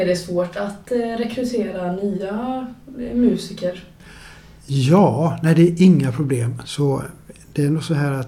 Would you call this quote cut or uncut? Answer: cut